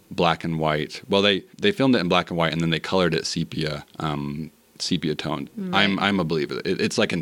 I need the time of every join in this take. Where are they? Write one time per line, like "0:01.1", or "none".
0:01.5
0:05.5